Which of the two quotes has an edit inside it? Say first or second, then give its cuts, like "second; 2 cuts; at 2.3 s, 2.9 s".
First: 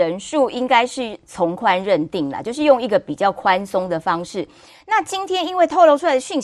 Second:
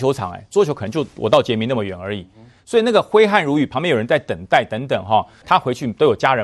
second; 1 cut; at 5.4 s